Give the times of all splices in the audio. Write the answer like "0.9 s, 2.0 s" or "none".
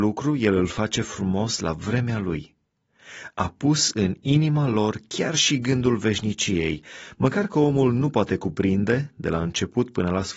none